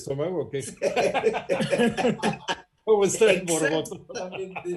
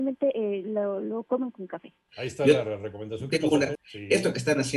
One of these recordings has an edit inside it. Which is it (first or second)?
second